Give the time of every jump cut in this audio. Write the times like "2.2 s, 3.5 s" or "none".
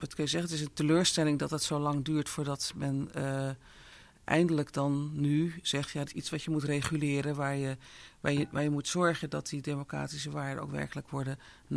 6.0 s